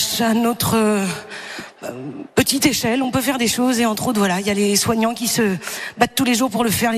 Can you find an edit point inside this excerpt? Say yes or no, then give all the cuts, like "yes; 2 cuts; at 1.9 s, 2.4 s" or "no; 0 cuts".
no; 0 cuts